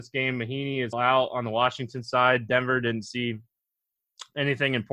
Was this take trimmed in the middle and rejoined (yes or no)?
yes